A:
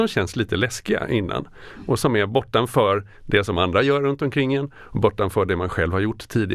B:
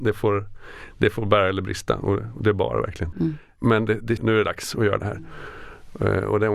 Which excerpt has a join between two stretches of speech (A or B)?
B